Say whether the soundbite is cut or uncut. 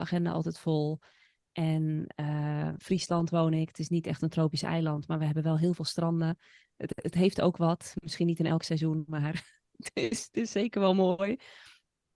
cut